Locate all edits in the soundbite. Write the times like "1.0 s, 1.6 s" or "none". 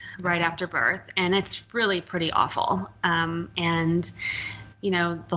3.5 s